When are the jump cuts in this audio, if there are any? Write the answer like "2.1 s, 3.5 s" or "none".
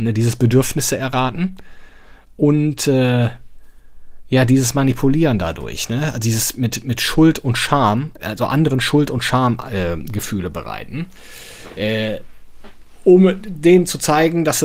none